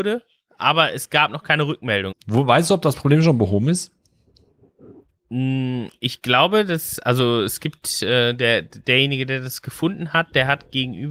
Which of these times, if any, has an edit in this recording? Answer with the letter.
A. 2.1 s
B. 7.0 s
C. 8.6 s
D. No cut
A